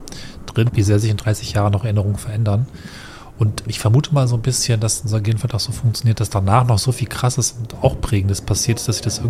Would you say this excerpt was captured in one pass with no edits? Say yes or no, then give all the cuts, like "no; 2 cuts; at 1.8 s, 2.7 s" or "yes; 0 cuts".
no; 1 cut; at 3.7 s